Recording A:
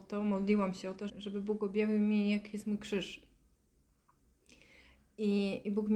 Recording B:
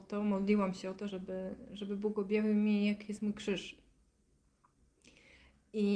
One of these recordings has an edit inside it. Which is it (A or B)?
A